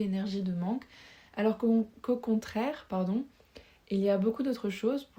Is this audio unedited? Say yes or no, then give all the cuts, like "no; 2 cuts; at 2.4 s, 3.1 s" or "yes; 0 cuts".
yes; 0 cuts